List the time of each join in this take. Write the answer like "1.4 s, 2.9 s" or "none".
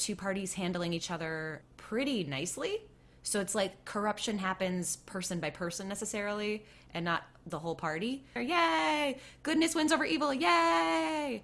8.4 s